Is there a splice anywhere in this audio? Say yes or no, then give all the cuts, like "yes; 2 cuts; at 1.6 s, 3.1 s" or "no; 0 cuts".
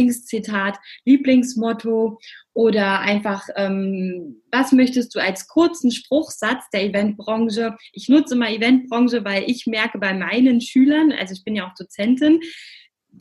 no; 0 cuts